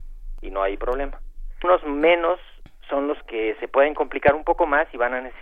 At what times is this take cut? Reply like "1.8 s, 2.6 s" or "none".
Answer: 1.6 s